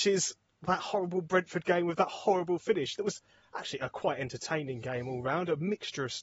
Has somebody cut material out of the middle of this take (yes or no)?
no